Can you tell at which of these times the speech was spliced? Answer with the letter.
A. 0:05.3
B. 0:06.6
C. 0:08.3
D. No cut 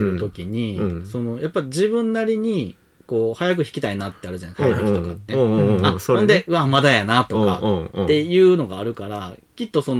A